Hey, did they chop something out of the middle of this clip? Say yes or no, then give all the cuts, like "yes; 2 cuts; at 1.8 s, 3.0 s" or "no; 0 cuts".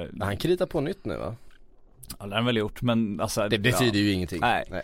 yes; 1 cut; at 3.5 s